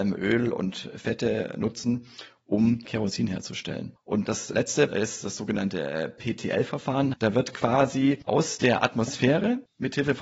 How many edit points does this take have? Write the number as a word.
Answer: two